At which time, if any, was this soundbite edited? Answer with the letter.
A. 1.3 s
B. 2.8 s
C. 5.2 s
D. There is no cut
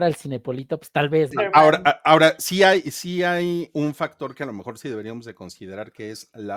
A